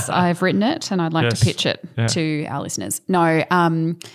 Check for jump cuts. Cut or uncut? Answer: uncut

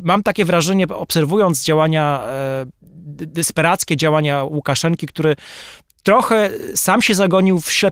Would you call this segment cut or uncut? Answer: uncut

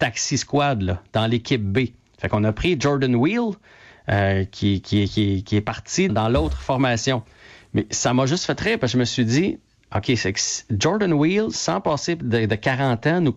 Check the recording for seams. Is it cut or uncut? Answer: cut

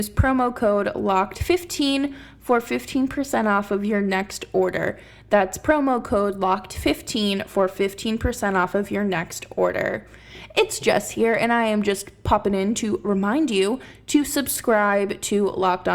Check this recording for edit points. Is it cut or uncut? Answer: uncut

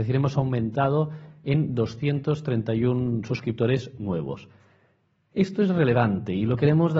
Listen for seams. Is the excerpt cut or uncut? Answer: uncut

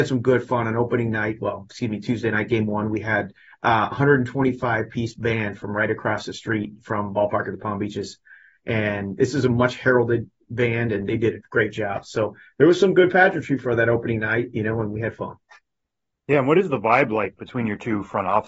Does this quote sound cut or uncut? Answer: uncut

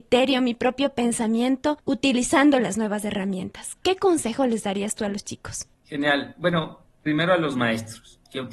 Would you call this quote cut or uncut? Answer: uncut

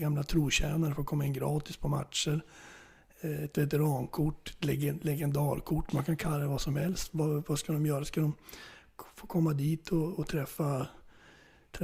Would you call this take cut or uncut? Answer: uncut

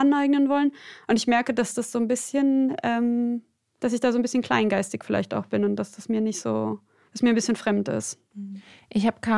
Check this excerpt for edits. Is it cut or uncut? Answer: uncut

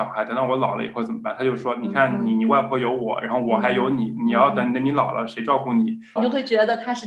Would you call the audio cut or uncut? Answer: cut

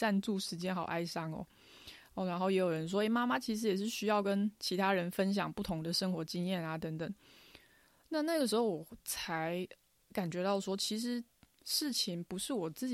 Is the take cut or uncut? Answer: uncut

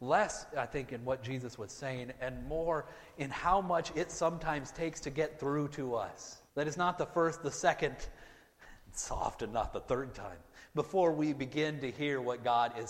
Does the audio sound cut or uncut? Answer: cut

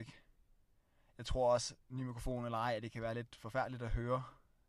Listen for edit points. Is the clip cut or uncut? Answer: cut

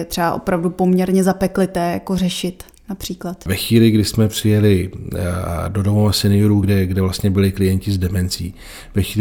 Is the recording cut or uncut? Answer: uncut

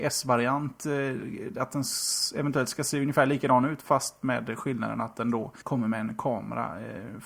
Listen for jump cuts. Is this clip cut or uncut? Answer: cut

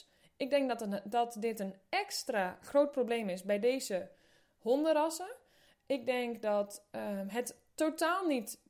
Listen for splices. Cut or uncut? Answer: uncut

